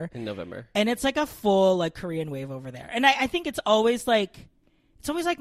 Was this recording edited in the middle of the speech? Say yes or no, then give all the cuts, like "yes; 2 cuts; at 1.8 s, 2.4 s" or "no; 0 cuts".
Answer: yes; 1 cut; at 3.4 s